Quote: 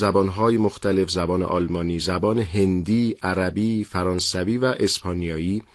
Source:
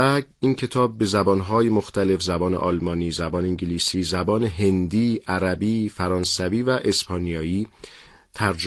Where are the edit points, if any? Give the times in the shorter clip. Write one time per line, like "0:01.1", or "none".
0:02.0